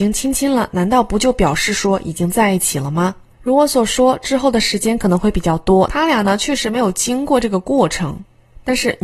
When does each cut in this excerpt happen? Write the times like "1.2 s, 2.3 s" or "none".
3.3 s, 5.9 s

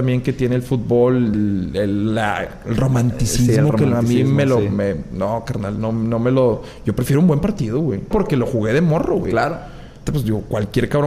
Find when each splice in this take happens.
1.3 s, 8.1 s, 10.1 s

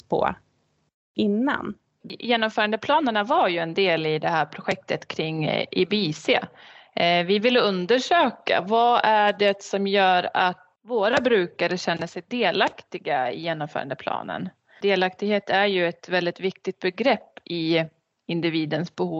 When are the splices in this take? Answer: 2.0 s

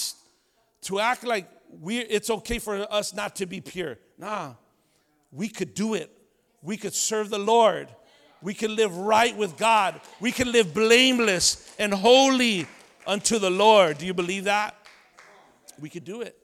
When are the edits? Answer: none

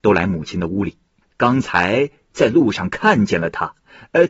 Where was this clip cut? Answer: 1.2 s

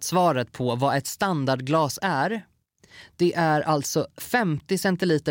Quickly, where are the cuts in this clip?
none

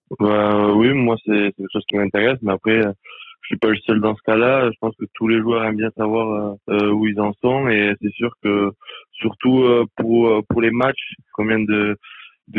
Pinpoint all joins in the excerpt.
6.6 s, 11.3 s

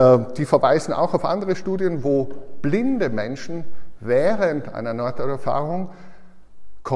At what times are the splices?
none

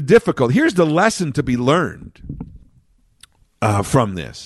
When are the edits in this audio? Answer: none

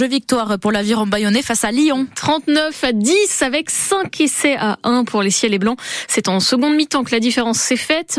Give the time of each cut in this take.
none

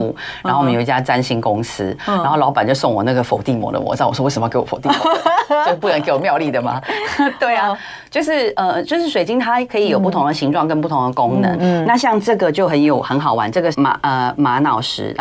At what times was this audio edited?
11.6 s, 13.7 s

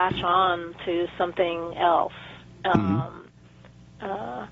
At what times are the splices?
none

